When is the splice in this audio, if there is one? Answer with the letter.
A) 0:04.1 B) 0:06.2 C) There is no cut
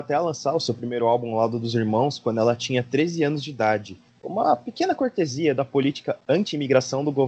A